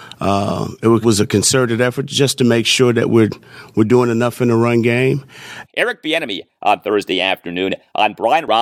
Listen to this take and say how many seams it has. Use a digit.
2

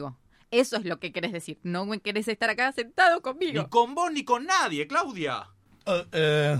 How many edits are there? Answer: 0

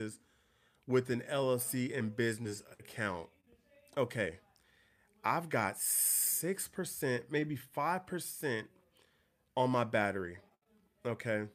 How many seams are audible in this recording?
0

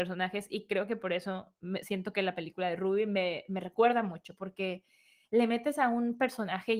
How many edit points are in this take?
0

